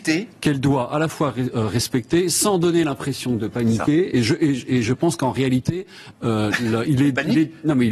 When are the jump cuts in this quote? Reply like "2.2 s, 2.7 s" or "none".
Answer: none